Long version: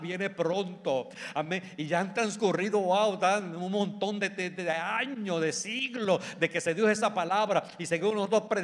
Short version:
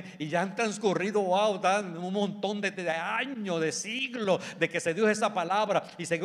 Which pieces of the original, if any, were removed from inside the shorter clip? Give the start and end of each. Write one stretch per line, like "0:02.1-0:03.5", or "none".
0:04.3-0:04.5